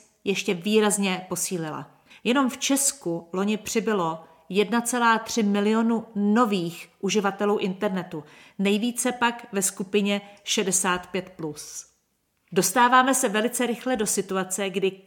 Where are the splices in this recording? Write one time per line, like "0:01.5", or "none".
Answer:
0:02.1